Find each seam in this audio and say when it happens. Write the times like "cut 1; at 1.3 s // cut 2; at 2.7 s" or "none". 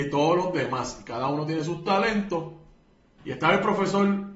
cut 1; at 3.2 s